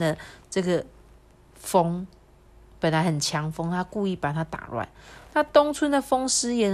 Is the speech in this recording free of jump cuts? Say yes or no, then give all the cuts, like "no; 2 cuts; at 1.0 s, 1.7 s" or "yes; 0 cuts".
yes; 0 cuts